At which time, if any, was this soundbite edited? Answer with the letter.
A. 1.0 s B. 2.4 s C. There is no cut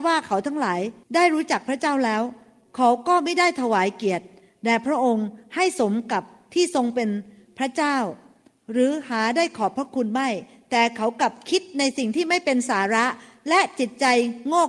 A